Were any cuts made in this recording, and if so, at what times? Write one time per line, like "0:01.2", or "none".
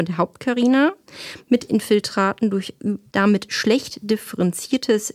0:03.1